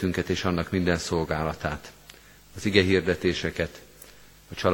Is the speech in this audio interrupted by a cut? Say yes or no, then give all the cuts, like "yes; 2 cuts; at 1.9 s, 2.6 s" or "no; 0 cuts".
no; 0 cuts